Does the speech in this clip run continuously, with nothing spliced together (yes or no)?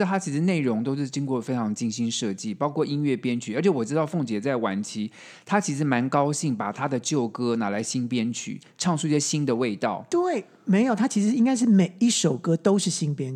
yes